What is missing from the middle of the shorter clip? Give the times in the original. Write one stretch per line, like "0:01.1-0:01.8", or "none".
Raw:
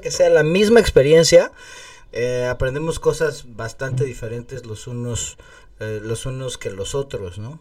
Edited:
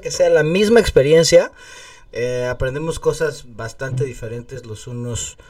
none